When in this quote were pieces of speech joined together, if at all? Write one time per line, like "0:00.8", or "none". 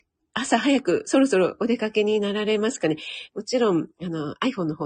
0:03.3